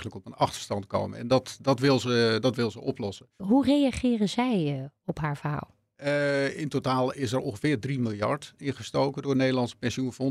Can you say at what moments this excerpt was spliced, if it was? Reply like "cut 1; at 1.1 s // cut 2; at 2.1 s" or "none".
cut 1; at 3.4 s

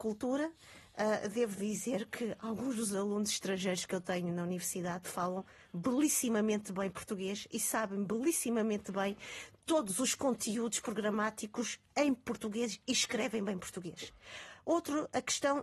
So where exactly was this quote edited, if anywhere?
none

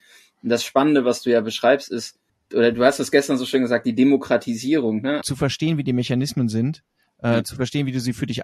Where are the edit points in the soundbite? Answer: cut 1; at 5.2 s

